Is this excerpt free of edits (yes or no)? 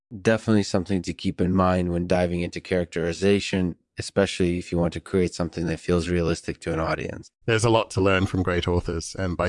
no